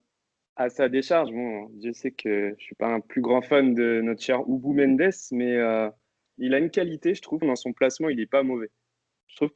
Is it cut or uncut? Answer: cut